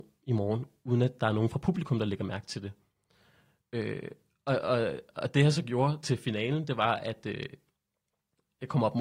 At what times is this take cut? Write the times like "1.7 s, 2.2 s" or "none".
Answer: none